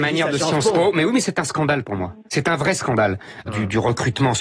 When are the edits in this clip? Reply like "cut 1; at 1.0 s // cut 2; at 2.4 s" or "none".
cut 1; at 2.3 s // cut 2; at 3.4 s